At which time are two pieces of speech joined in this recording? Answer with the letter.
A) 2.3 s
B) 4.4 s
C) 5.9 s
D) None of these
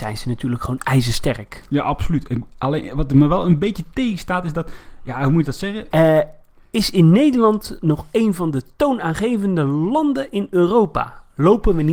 C